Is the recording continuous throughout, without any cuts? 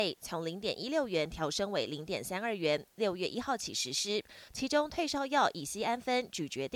no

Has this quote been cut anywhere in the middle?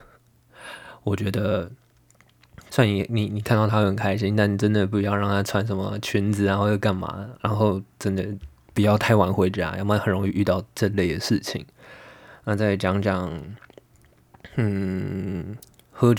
yes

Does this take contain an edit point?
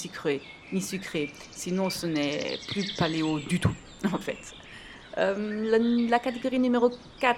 no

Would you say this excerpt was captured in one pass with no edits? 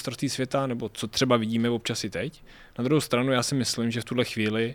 yes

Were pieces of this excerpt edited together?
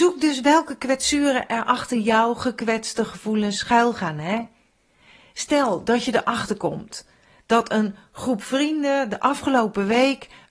no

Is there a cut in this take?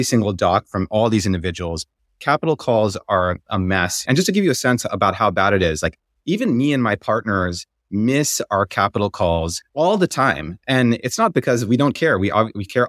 yes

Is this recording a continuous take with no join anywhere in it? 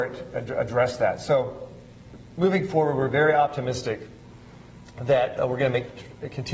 yes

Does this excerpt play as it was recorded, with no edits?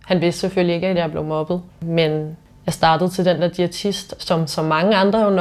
no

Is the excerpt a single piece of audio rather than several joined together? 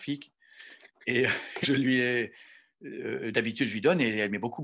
no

